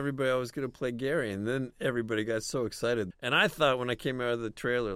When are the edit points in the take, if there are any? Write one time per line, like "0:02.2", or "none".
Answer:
0:03.1